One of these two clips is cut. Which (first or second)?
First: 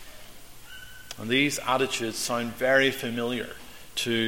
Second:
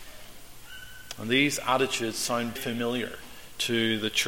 second